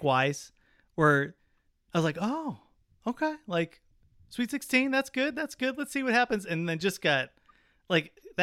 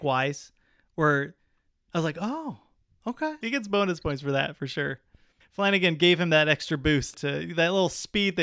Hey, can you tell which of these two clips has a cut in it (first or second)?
second